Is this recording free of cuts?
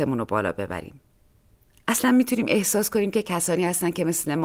yes; 0 cuts

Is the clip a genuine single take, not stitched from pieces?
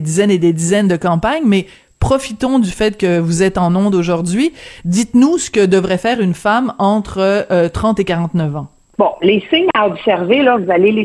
yes; 0 cuts

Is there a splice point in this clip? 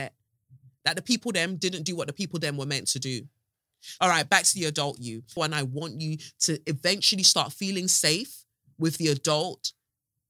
yes; 2 cuts; at 4.0 s, 5.4 s

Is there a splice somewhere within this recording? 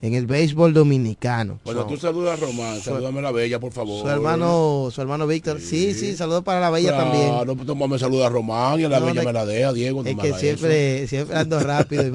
yes; 1 cut; at 1.7 s

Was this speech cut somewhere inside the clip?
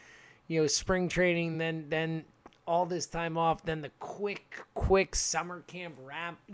no; 0 cuts

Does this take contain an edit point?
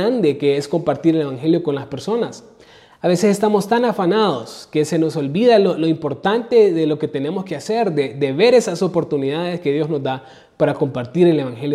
no; 0 cuts

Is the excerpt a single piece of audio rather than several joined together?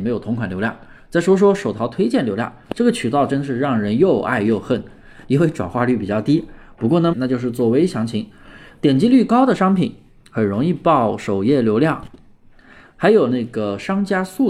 no; 1 cut; at 7.1 s

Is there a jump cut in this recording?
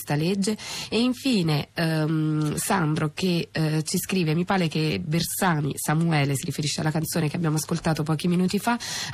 no; 0 cuts

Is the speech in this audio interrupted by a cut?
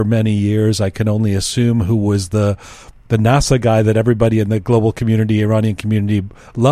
no; 0 cuts

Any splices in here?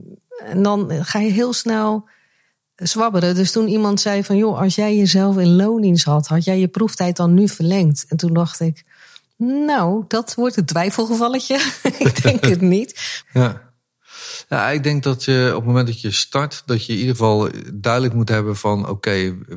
yes; 1 cut; at 13.2 s

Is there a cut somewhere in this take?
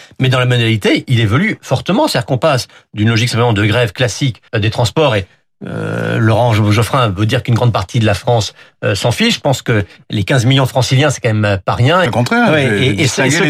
yes; 2 cuts; at 4.5 s, 12.1 s

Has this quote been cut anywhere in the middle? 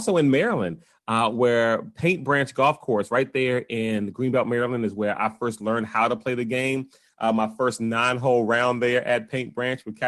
no; 0 cuts

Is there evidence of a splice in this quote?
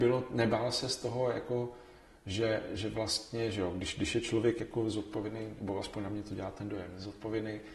no; 0 cuts

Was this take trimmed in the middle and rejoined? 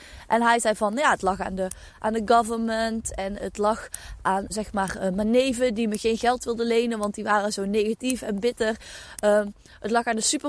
yes; 1 cut; at 4.5 s

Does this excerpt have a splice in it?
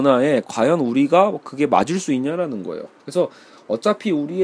yes; 1 cut; at 3.0 s

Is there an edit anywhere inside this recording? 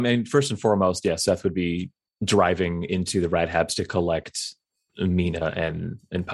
no; 0 cuts

